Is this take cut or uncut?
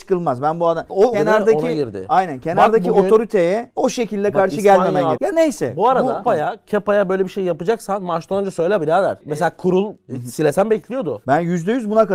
cut